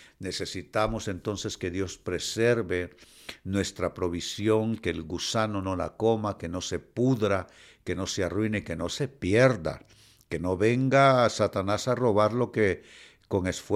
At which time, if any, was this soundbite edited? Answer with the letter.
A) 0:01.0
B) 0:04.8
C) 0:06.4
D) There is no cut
D